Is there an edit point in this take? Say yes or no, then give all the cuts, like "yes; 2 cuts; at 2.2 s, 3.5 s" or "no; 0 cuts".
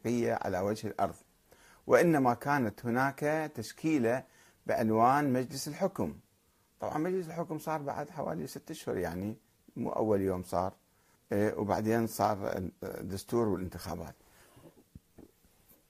yes; 1 cut; at 11.1 s